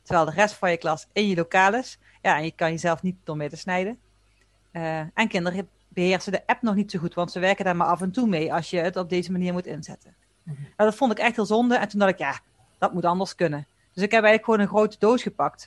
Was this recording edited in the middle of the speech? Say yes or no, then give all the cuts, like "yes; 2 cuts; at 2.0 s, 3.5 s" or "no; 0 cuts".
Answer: no; 0 cuts